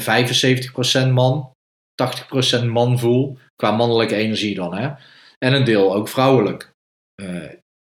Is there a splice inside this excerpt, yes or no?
no